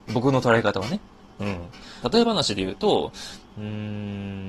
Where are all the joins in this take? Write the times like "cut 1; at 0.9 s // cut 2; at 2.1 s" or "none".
cut 1; at 2.0 s // cut 2; at 3.4 s